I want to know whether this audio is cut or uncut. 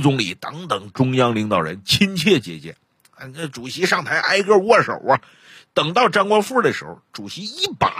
uncut